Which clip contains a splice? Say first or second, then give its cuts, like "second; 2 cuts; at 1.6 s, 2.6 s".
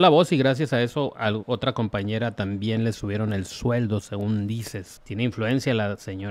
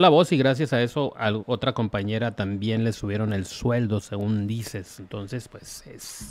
first; 1 cut; at 5.0 s